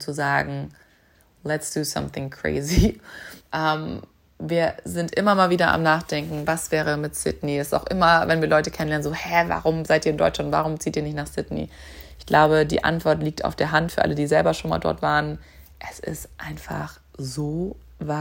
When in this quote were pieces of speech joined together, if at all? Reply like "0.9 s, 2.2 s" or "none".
3.4 s